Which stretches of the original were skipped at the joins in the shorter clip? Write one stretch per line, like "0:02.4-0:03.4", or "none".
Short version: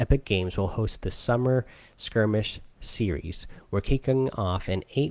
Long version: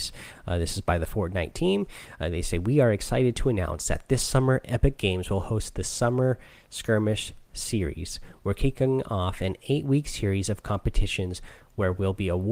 none